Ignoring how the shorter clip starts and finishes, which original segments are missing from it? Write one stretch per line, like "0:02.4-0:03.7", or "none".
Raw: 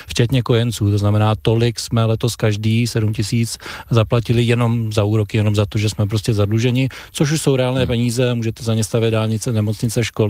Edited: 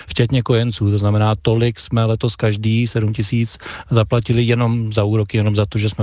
none